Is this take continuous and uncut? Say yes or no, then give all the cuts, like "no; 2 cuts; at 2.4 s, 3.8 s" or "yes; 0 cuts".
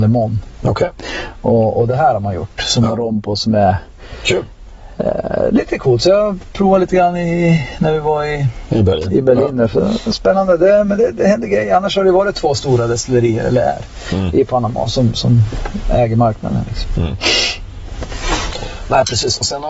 yes; 0 cuts